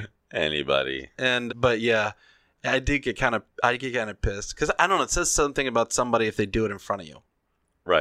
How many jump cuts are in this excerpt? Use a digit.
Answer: 1